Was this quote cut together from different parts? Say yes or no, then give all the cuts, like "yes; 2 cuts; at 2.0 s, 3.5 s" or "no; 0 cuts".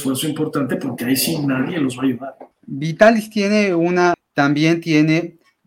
yes; 2 cuts; at 2.5 s, 4.1 s